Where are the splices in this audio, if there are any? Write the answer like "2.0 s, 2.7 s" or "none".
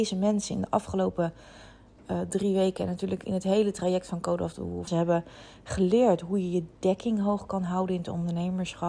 4.9 s